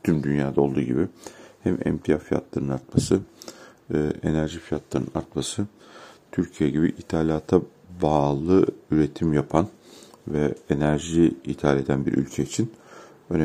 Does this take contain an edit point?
no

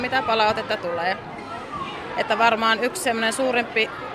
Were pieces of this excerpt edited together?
no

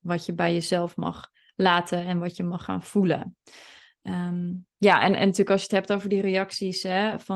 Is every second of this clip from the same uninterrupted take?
no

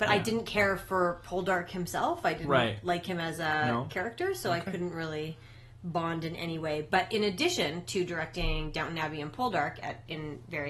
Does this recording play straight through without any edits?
yes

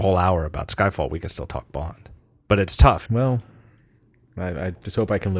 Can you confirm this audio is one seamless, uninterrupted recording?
no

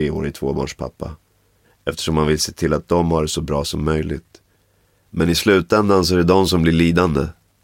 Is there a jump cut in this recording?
yes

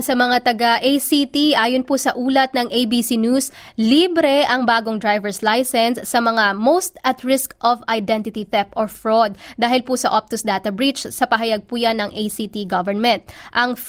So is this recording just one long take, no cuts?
yes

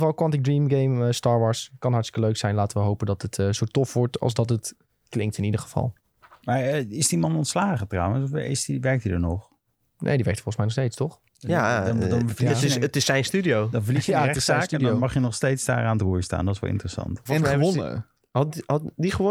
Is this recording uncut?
no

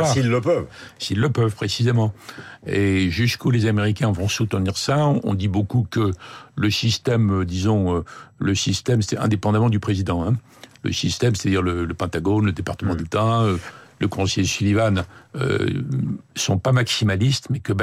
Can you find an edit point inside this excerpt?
no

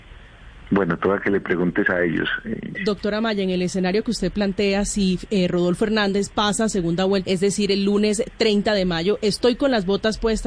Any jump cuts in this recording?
yes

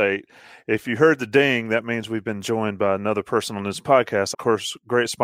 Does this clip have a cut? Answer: yes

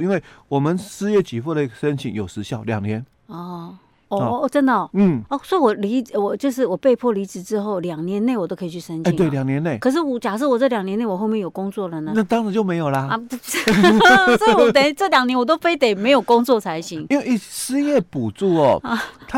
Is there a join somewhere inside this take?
no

